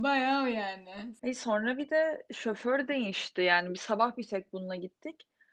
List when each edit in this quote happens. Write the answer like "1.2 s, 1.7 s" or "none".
1.2 s